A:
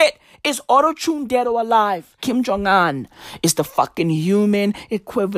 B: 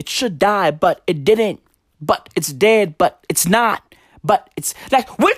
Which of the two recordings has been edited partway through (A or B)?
A